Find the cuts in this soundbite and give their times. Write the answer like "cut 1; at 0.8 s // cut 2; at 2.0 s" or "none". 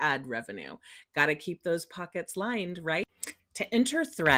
cut 1; at 3.4 s